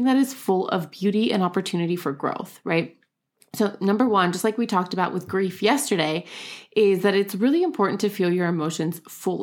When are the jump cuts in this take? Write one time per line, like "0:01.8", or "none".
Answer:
none